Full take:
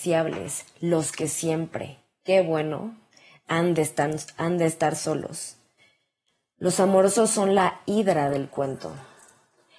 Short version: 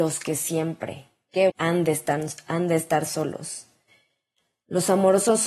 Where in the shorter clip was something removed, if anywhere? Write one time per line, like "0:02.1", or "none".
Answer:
0:01.5